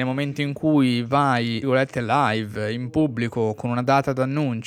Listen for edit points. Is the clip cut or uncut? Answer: cut